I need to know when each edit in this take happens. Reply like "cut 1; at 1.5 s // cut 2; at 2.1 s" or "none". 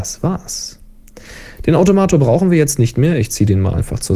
none